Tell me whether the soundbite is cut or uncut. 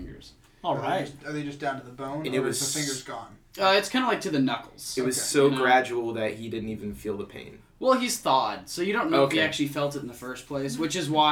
uncut